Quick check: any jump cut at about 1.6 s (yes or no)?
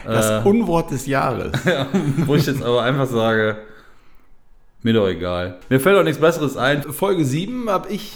no